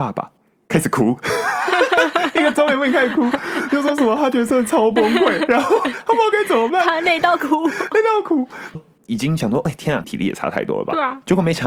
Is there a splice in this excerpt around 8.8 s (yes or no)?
yes